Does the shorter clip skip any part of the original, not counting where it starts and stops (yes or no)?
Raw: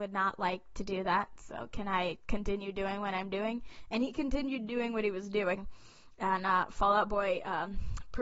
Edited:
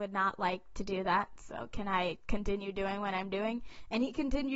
no